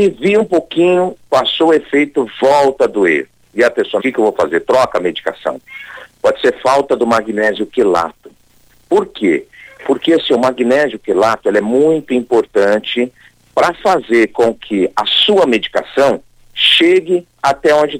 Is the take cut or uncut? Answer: cut